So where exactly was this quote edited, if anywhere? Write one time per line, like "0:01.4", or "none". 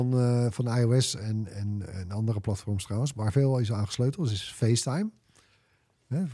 0:03.1